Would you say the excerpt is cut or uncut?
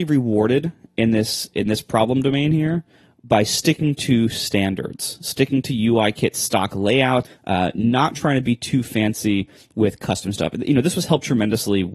cut